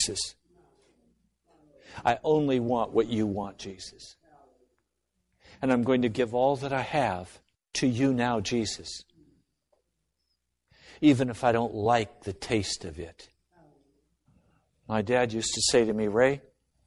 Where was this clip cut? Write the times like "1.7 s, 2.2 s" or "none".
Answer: none